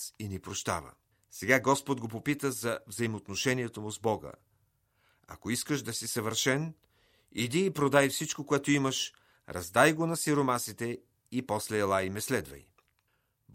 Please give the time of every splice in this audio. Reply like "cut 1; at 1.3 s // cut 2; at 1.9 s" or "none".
cut 1; at 1.1 s